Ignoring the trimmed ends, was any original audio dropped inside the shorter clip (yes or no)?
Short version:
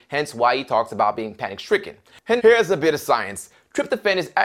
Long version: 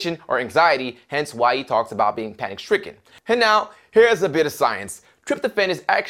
yes